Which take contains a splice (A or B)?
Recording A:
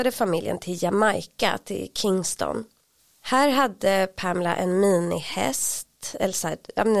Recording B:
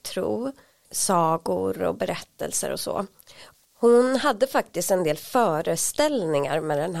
B